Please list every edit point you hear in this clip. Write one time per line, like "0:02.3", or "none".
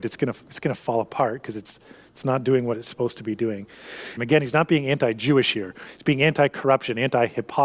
0:04.2